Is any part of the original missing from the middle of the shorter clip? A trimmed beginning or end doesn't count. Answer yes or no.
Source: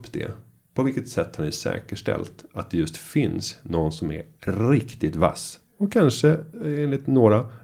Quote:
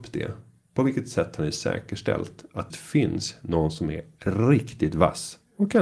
yes